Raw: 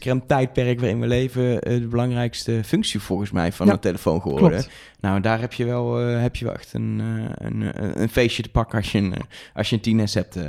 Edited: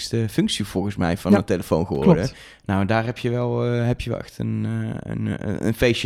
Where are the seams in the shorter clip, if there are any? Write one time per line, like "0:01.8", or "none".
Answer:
none